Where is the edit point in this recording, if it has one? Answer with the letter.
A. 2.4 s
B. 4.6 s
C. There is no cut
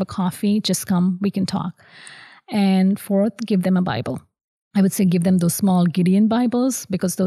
C